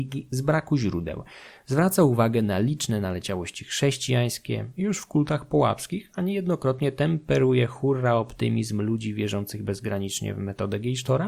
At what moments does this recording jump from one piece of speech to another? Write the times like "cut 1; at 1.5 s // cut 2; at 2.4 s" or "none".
none